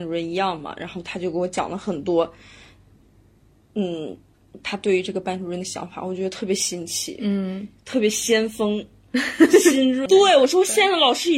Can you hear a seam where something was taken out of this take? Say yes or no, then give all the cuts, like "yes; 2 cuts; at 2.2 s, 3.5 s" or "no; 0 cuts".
yes; 1 cut; at 10.1 s